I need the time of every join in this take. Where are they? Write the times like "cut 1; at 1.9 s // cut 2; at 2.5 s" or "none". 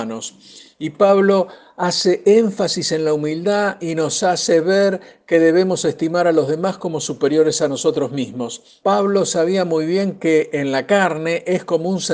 cut 1; at 8.8 s

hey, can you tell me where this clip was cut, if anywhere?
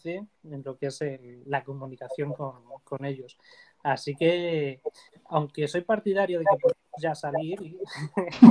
none

